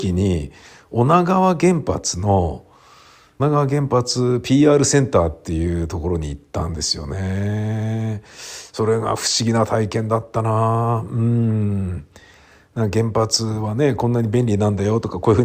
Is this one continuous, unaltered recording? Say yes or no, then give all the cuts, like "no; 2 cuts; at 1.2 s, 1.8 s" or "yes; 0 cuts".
no; 1 cut; at 3.4 s